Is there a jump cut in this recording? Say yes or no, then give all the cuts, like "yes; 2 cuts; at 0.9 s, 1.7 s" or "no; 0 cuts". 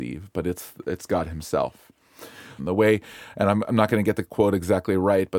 yes; 1 cut; at 2.6 s